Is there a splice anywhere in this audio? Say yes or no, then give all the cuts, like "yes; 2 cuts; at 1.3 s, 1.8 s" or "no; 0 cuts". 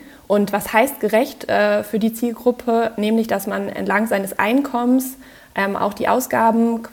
no; 0 cuts